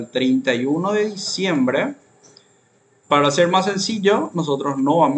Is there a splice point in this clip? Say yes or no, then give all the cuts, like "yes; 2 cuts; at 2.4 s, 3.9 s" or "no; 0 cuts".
yes; 1 cut; at 3.0 s